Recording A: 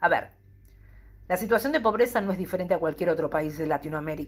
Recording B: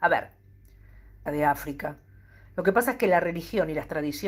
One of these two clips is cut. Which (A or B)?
B